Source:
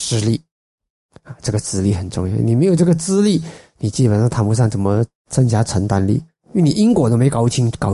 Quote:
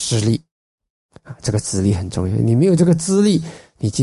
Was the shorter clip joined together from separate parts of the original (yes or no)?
no